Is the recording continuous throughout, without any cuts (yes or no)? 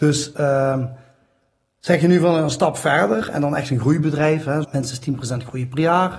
no